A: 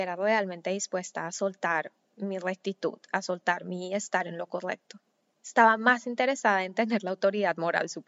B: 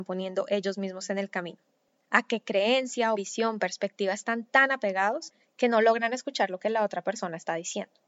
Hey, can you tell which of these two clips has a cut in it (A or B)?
B